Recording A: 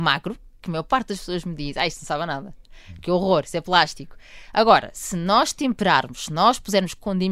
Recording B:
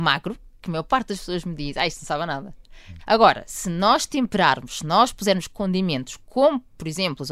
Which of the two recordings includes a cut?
B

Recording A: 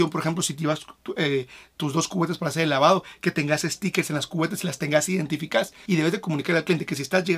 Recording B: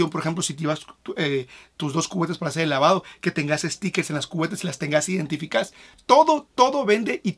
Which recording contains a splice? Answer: A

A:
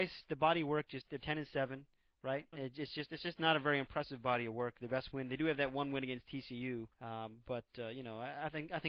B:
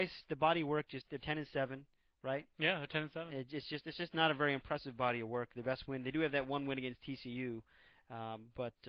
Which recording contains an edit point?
A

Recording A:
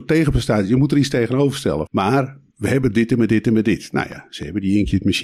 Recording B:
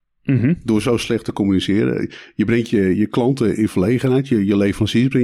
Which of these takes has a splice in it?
A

